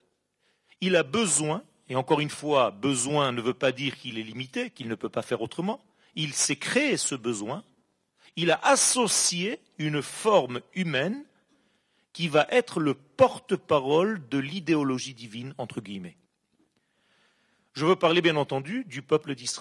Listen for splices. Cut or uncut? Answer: uncut